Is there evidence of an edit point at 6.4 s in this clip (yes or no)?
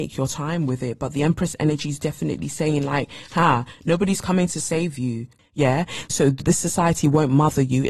yes